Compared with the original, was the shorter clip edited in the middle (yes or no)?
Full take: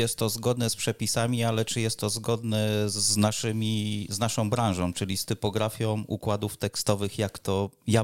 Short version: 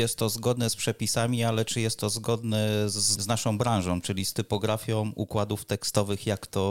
yes